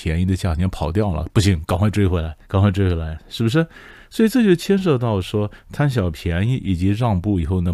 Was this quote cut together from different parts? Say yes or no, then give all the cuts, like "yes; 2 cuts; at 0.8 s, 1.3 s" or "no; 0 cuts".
yes; 1 cut; at 2.4 s